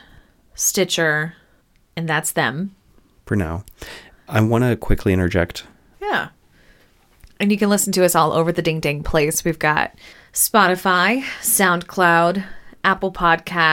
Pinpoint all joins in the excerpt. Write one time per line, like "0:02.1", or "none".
0:05.9